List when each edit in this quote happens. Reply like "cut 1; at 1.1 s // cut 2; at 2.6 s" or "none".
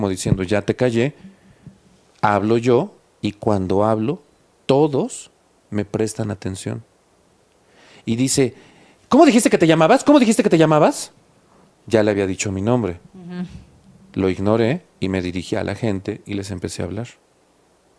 none